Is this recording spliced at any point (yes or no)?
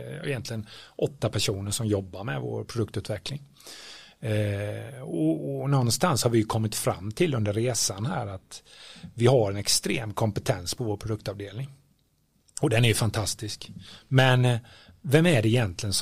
no